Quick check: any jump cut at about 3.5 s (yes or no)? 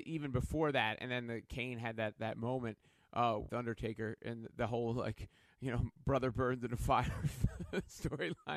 yes